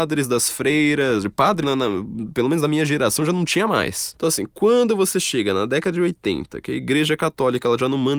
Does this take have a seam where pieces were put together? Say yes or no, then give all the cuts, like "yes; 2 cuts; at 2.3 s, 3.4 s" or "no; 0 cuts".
yes; 2 cuts; at 1.6 s, 4.1 s